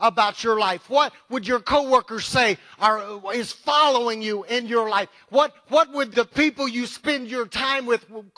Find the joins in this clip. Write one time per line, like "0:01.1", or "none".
0:06.1